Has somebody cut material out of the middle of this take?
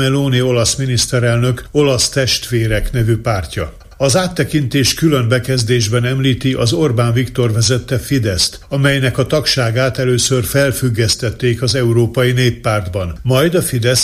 no; 0 cuts

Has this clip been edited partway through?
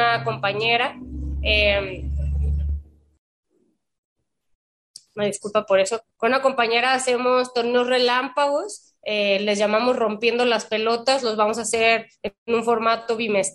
no; 0 cuts

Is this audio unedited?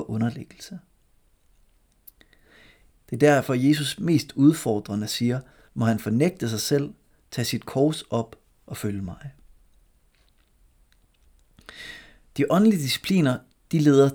no; 2 cuts; at 2.9 s, 5.7 s

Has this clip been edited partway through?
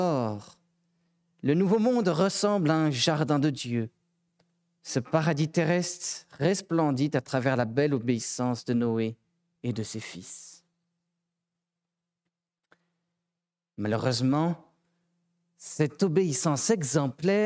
no; 0 cuts

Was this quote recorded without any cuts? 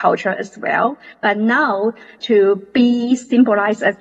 no; 1 cut; at 2.2 s

